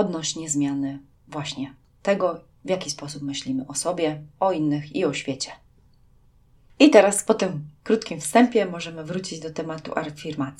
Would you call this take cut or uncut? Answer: uncut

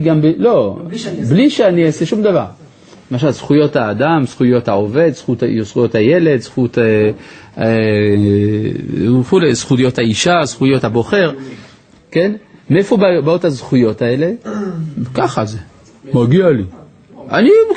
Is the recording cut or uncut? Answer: uncut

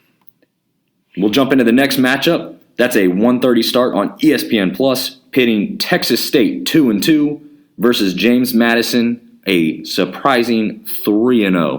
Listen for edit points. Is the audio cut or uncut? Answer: uncut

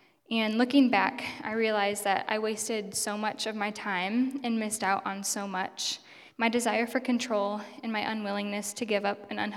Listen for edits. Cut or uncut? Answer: cut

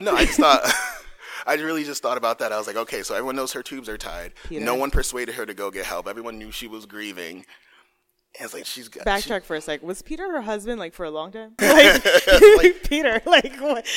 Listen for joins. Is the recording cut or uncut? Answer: cut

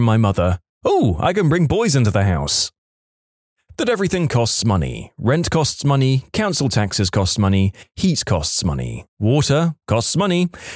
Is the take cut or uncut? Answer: uncut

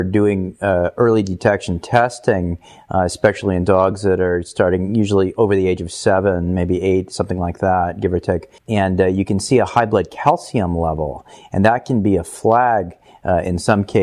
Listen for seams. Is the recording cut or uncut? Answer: cut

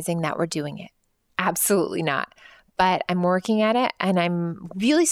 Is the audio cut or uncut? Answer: cut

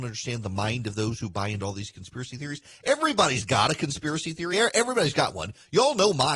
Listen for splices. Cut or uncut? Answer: uncut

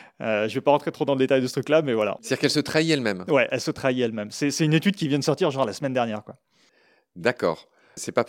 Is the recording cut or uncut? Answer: uncut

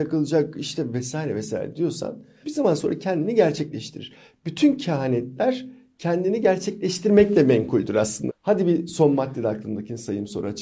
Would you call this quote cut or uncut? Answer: cut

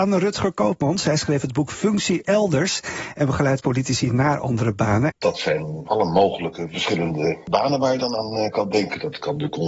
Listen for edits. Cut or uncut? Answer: cut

